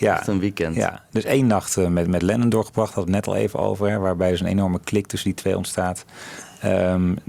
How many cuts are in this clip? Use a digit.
0